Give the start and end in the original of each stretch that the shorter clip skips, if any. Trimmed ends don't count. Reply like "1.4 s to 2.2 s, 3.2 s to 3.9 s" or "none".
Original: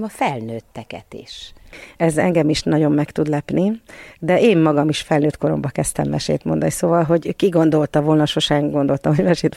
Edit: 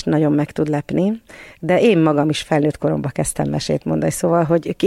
none